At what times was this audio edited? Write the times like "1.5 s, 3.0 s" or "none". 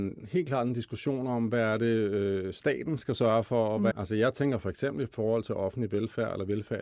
3.9 s